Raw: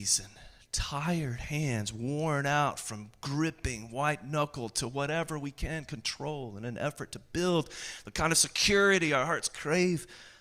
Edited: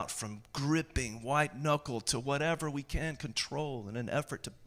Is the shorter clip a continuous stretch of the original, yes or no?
yes